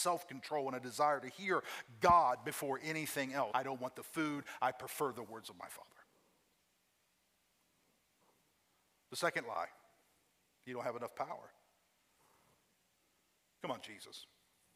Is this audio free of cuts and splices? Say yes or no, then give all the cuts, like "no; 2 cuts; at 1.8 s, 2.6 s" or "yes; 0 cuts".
no; 1 cut; at 3.5 s